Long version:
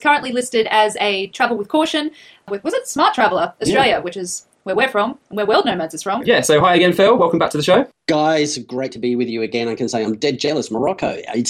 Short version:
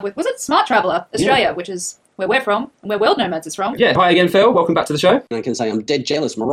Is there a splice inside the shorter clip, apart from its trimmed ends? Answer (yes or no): yes